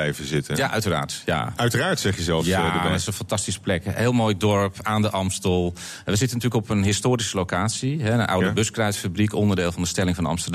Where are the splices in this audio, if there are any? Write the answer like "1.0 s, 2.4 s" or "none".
none